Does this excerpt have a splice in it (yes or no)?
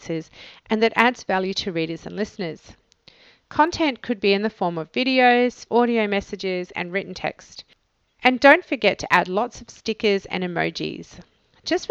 yes